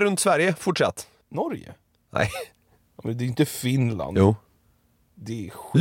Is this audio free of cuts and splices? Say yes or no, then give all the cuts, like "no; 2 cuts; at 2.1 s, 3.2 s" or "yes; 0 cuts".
yes; 0 cuts